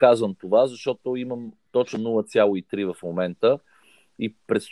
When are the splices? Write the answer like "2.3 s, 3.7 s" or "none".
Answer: none